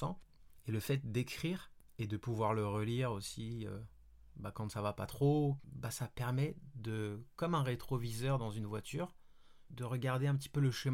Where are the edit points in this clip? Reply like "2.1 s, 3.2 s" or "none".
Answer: 5.6 s, 9.7 s